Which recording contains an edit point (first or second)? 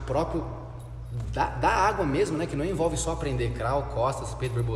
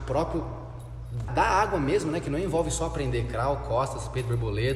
second